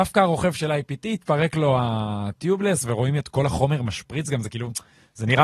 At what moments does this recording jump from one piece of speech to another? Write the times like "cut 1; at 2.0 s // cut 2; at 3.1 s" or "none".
none